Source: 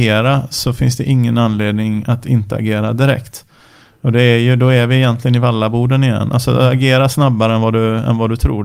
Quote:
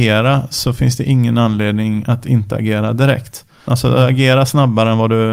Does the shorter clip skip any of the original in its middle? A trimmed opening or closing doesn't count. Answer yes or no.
yes